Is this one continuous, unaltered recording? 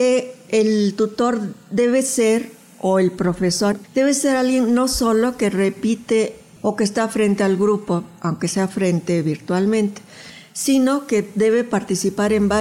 no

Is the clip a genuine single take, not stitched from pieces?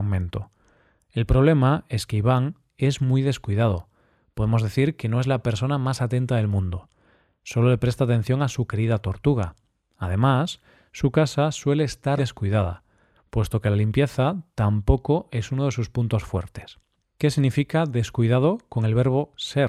no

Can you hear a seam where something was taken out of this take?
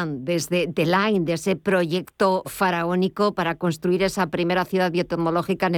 yes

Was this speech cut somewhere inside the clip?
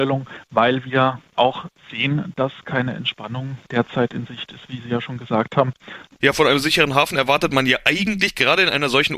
yes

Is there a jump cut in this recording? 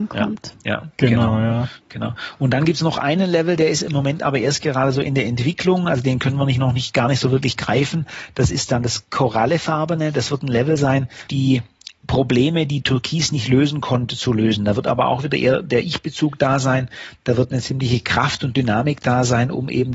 yes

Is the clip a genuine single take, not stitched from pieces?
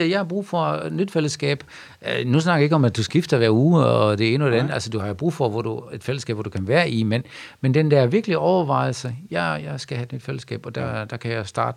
yes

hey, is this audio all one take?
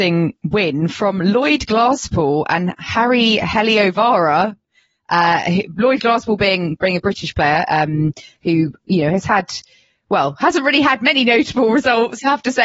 yes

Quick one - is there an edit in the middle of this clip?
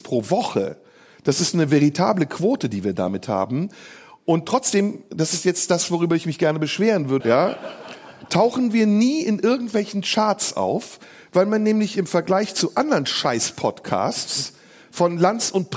yes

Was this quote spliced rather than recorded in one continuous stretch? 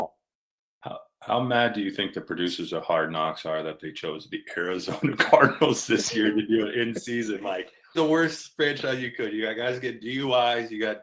yes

